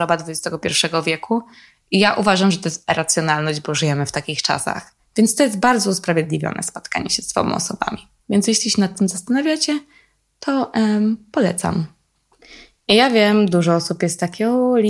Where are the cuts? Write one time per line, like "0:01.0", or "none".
0:05.0
0:08.2